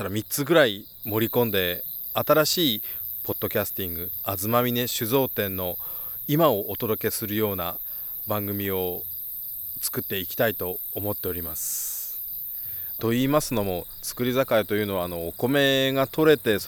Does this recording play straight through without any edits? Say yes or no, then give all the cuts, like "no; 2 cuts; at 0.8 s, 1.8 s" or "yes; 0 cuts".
no; 1 cut; at 13.0 s